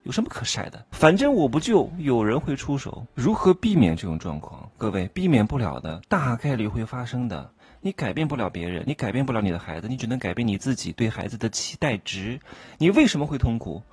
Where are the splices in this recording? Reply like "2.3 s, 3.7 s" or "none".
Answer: 0.9 s